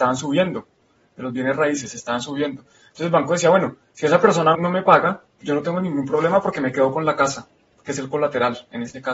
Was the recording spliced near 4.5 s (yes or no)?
yes